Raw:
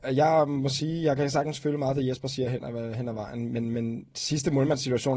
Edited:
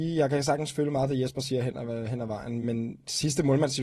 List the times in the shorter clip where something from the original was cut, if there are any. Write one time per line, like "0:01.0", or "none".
0:02.6